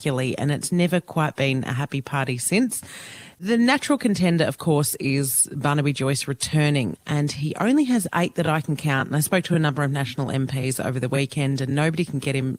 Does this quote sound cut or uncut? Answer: cut